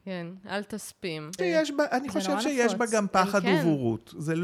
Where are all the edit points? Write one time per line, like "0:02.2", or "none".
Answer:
0:01.4